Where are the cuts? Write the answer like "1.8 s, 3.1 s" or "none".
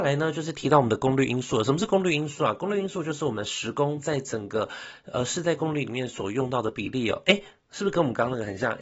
none